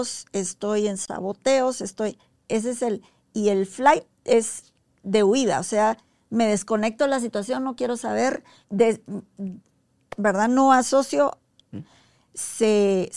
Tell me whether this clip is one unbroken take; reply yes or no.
no